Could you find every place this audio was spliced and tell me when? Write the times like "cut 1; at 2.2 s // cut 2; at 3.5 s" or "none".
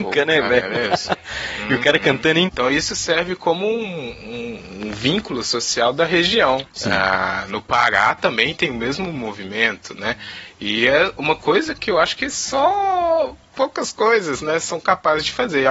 cut 1; at 2.5 s // cut 2; at 7.5 s

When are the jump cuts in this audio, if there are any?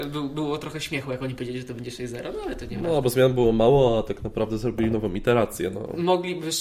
none

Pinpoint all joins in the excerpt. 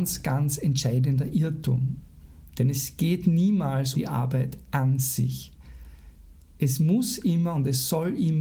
cut 1; at 3.9 s

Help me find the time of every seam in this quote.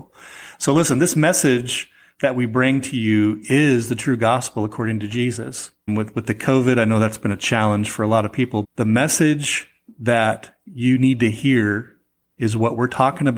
cut 1; at 5.9 s // cut 2; at 8.6 s

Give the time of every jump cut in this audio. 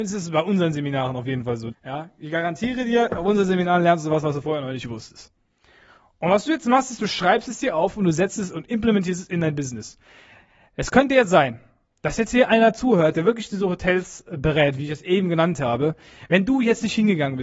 cut 1; at 1.7 s

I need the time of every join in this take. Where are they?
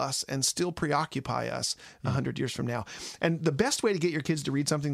none

